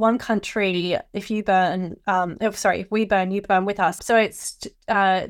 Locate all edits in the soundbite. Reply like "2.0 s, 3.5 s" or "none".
4.0 s